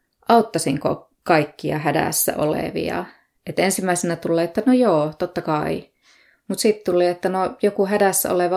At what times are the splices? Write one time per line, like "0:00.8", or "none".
none